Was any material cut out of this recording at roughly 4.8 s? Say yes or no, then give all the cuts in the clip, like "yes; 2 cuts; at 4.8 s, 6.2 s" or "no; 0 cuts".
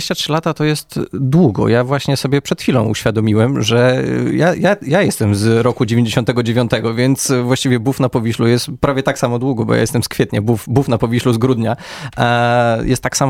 no; 0 cuts